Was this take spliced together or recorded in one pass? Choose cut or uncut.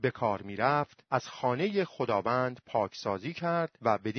uncut